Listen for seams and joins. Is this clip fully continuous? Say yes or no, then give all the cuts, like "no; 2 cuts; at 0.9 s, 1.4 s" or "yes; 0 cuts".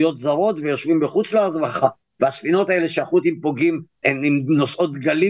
no; 1 cut; at 4.0 s